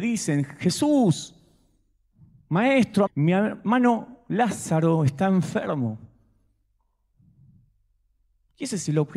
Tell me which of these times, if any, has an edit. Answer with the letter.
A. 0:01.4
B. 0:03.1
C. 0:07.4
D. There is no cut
B